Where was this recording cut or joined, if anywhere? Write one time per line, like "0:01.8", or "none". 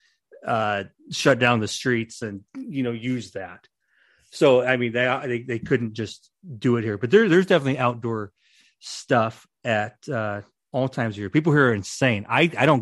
0:02.5